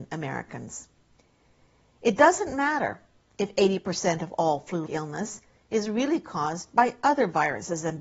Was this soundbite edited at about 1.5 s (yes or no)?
no